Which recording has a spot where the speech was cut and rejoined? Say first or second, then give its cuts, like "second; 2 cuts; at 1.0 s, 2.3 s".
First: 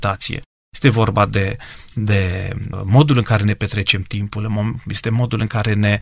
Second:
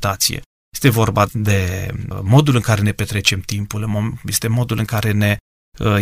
second; 1 cut; at 1.3 s